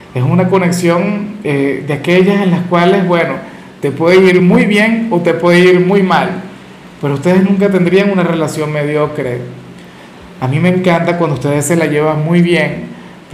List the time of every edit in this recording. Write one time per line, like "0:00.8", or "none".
none